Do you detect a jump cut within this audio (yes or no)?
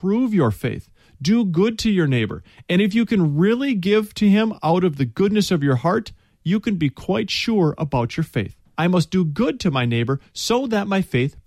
yes